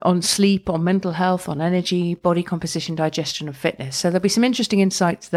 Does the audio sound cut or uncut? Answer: uncut